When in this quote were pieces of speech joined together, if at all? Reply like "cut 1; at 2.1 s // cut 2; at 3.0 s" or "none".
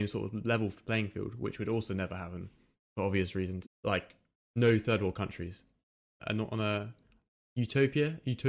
cut 1; at 3.6 s // cut 2; at 6.2 s